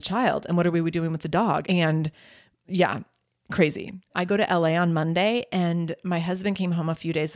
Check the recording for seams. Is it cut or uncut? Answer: cut